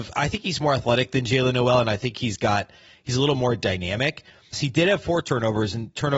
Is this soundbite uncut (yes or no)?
no